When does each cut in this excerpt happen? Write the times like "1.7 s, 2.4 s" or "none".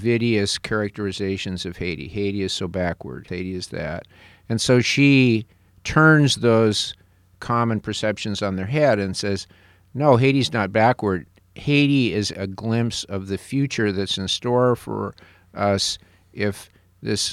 3.3 s, 12.3 s